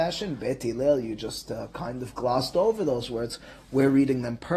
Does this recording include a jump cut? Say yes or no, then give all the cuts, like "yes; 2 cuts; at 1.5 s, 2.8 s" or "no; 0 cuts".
no; 0 cuts